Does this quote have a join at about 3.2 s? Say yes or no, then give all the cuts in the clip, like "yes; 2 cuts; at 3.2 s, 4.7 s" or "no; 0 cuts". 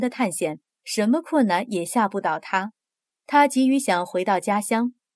yes; 1 cut; at 3.2 s